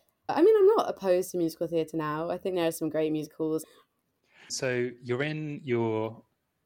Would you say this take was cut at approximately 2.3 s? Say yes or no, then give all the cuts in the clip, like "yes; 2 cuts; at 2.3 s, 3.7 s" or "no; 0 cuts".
no; 1 cut; at 3.6 s